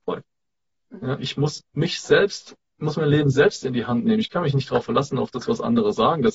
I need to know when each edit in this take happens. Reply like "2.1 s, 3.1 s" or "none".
none